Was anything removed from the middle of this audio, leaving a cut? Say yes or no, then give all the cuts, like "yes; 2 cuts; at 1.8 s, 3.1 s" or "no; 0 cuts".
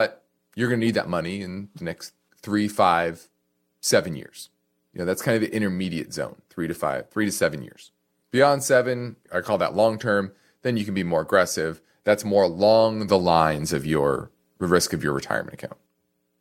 no; 0 cuts